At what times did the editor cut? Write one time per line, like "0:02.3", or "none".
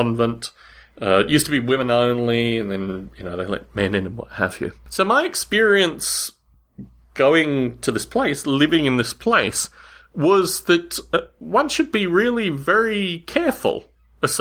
none